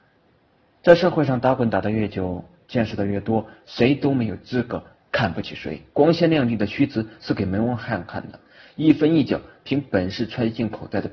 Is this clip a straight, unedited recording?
no; 2 cuts; at 3.6 s, 5.9 s

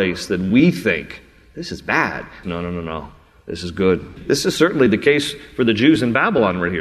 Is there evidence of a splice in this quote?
yes; 2 cuts; at 2.4 s, 4.2 s

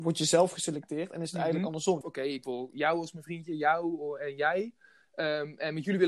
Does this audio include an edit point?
yes; 1 cut; at 2.0 s

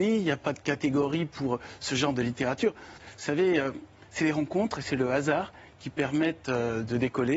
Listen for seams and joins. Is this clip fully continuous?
no; 1 cut; at 3.0 s

